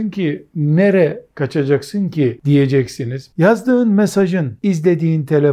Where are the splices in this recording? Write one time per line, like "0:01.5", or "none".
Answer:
0:03.3
0:04.6